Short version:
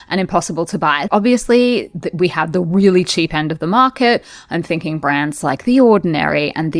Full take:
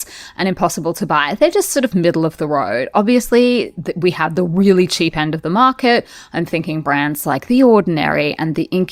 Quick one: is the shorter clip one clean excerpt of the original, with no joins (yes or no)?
no